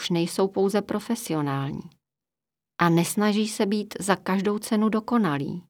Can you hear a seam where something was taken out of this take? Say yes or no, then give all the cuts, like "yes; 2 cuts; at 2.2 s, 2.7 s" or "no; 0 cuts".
no; 0 cuts